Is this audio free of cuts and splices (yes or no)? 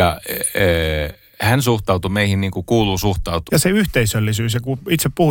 no